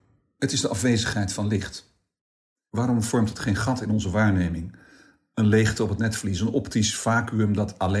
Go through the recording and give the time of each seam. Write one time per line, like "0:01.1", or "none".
0:02.7